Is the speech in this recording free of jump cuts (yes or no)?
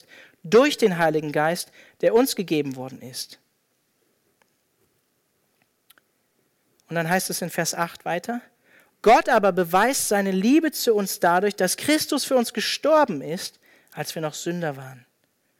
yes